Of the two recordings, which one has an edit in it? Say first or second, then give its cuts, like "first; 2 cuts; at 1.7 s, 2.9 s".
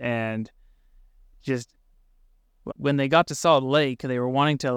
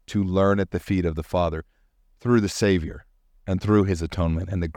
first; 1 cut; at 2.7 s